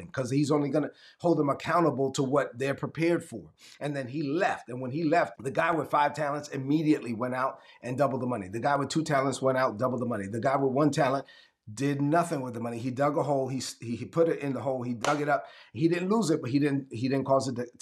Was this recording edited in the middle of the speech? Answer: yes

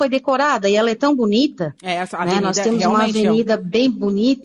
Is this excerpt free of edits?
yes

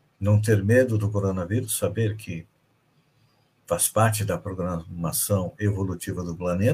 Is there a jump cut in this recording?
no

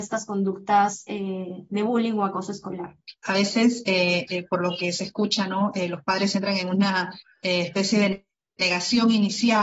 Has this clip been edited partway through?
no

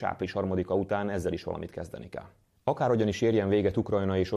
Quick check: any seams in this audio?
no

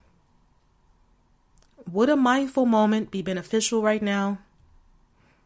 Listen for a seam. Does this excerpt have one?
no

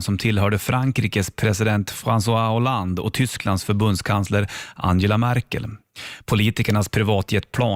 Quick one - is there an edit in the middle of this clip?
no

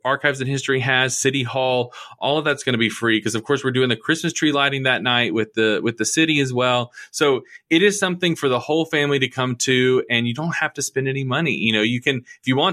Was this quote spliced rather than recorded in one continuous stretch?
no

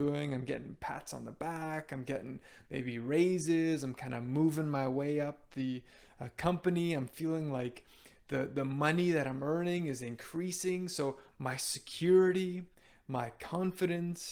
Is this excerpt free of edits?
yes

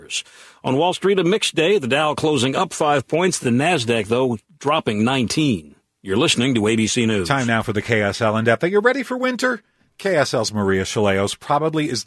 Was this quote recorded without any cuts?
yes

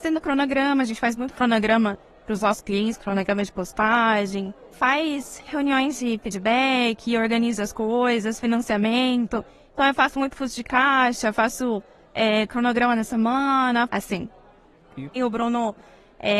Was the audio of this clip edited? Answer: yes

